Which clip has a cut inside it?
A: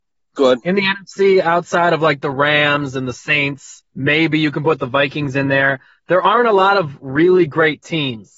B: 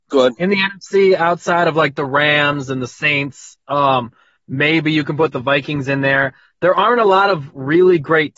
A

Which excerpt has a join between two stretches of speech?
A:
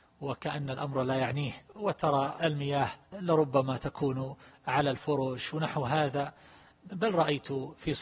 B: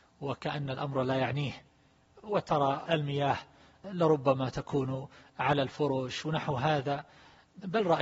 A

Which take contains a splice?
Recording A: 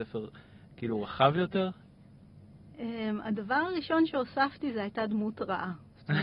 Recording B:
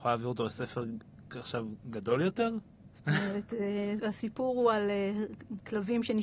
B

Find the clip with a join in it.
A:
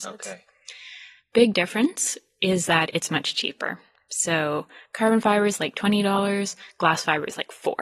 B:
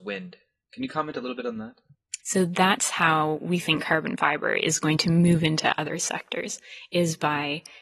B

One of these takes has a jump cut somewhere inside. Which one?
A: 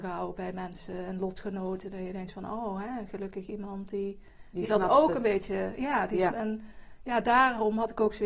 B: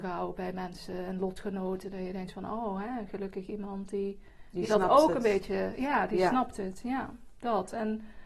A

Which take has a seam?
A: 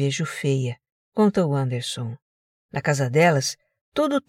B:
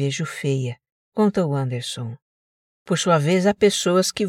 A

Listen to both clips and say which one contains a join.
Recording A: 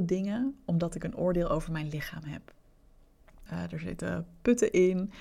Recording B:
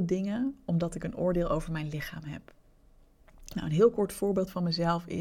A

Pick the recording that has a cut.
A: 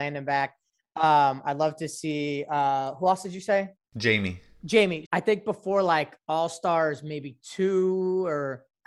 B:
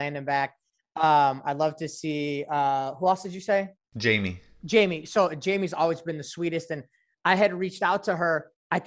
A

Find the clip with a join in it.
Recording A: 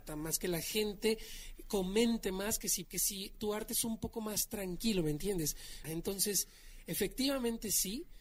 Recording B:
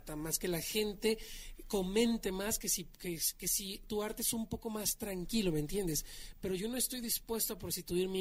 A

